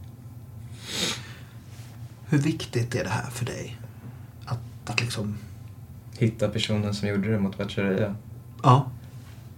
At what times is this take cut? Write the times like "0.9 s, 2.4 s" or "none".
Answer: 4.9 s